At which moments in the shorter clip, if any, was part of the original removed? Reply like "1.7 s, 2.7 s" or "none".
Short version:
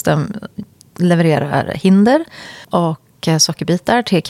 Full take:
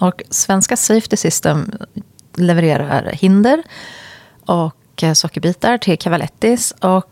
2.6 s